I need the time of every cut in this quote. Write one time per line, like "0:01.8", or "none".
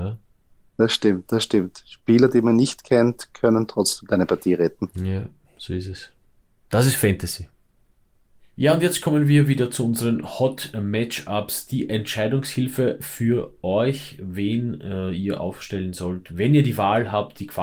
none